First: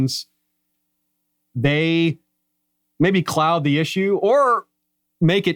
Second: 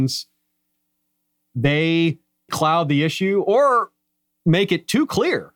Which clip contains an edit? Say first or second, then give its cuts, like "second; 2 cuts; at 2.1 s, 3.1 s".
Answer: second; 1 cut; at 2.5 s